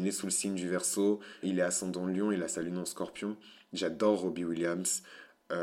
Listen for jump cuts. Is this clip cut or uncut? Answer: cut